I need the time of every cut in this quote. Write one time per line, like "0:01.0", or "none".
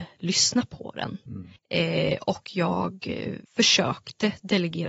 0:01.6
0:03.5